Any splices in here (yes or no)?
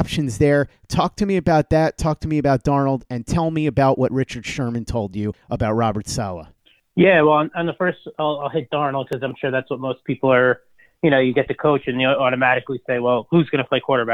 no